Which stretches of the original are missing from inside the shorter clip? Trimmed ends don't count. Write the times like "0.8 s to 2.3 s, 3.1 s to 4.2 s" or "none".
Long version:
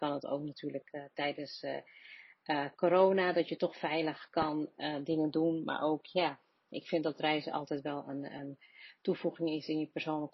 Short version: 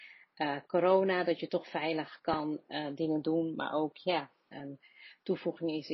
6.6 s to 8.3 s